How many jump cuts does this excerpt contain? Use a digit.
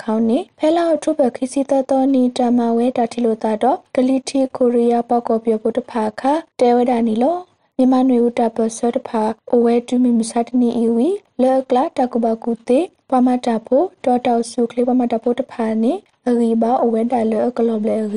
1